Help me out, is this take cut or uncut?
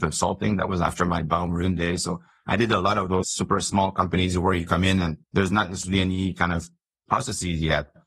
cut